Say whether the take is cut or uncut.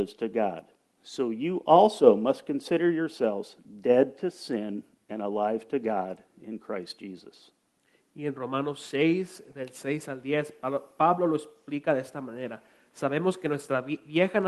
uncut